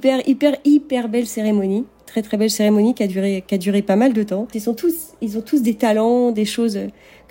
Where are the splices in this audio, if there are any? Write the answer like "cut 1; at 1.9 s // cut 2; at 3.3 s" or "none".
cut 1; at 4.5 s